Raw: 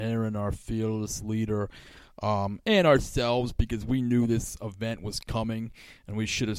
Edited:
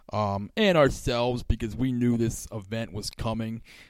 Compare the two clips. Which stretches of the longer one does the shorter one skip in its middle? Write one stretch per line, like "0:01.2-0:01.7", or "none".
none